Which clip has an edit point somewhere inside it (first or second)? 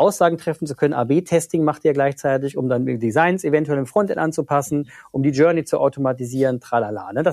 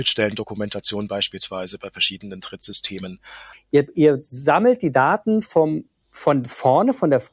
second